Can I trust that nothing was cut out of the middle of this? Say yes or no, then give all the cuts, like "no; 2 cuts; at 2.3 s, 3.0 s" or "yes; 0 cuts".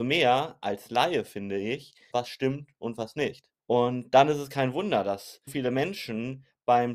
no; 3 cuts; at 2.1 s, 3.6 s, 5.5 s